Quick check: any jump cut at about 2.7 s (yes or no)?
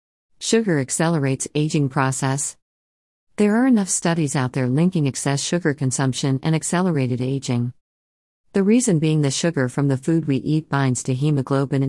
no